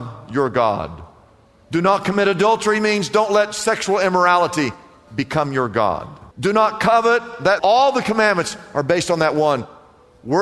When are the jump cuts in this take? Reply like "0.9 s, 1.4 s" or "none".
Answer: 6.3 s, 7.6 s